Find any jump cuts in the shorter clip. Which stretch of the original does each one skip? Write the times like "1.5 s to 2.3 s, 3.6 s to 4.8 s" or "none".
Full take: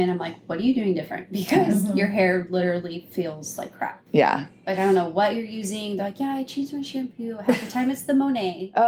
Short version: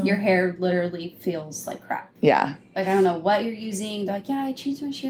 none